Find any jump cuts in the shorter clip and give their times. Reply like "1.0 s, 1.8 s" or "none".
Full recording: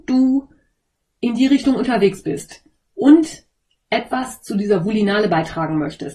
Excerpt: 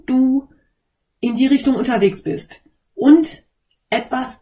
none